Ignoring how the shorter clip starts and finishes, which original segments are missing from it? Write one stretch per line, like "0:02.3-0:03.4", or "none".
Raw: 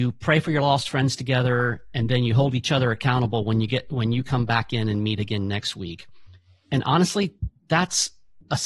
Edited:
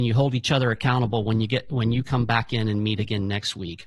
none